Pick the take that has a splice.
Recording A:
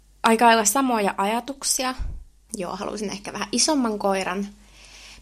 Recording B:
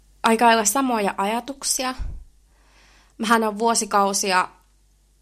A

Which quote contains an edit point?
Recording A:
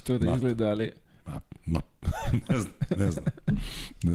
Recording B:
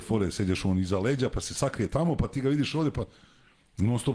A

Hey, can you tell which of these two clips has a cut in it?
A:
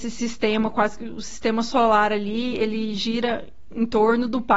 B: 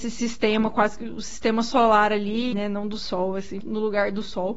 B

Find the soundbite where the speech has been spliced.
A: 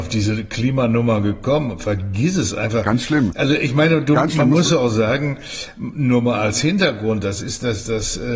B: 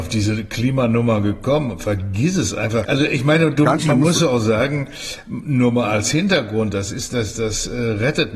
B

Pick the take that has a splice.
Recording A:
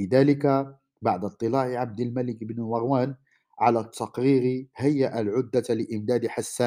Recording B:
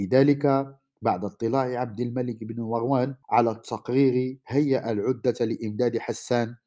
B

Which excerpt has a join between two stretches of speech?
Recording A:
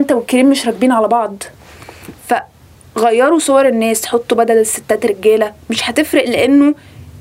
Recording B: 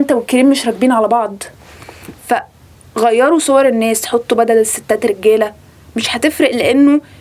A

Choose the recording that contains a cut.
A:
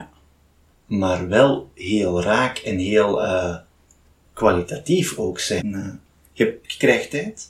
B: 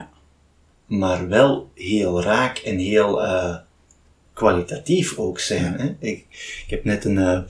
A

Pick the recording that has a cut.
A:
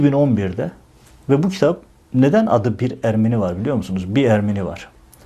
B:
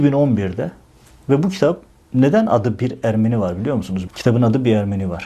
B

